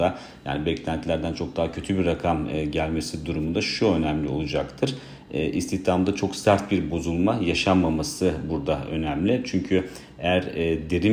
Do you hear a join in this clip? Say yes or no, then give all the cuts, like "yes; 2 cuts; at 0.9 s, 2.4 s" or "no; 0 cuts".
no; 0 cuts